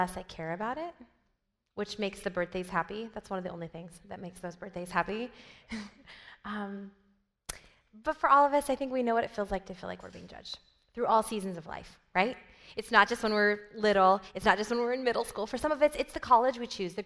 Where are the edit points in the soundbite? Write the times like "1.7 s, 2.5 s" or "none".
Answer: none

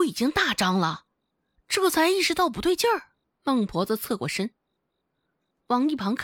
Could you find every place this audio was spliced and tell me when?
3.3 s

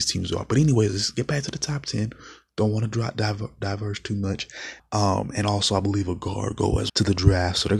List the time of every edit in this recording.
4.8 s, 6.9 s

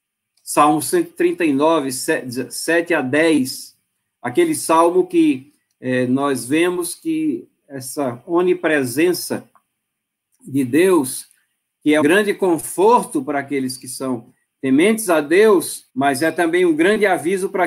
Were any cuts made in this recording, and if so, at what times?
12.0 s, 15.9 s

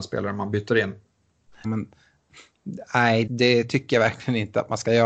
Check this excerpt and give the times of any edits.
1.6 s, 3.3 s

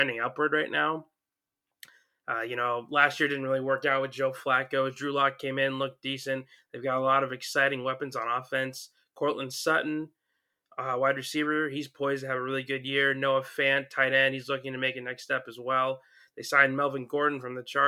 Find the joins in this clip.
none

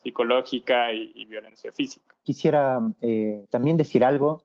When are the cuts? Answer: none

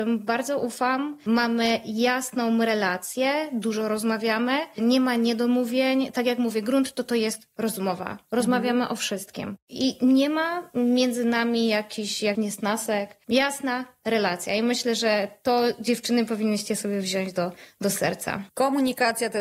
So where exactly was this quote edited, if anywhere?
12.3 s

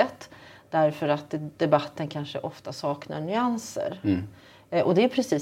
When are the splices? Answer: 1.6 s

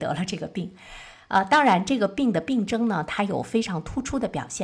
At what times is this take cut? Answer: none

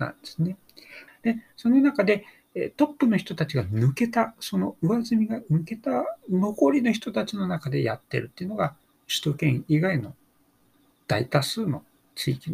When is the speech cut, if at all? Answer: 1.1 s, 9.0 s

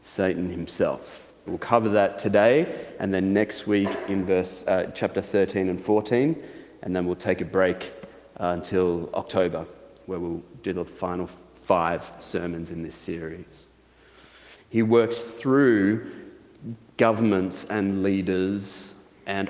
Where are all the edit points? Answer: 1.5 s, 14.6 s

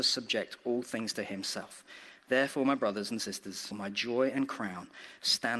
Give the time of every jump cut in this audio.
3.7 s

